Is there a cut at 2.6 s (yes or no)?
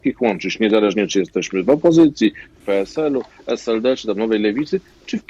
yes